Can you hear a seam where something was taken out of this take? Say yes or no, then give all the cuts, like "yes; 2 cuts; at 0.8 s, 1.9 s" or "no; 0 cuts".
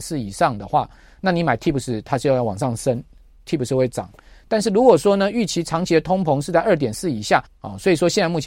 yes; 1 cut; at 7.5 s